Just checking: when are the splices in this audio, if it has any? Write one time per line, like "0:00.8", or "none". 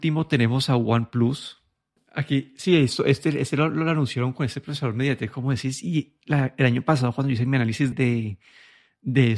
0:07.9

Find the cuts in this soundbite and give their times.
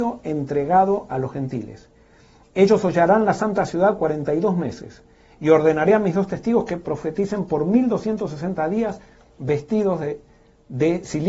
none

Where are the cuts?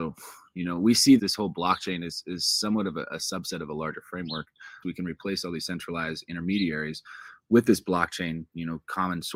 0:01.2
0:04.8

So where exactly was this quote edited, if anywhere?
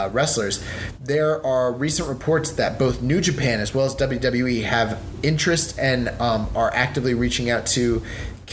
none

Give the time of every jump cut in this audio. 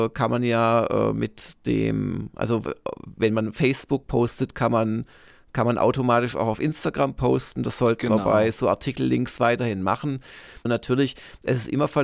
0:10.7

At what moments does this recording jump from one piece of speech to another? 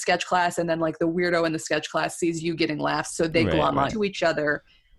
0:03.9

